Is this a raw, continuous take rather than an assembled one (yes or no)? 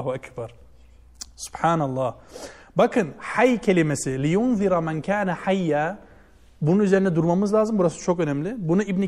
yes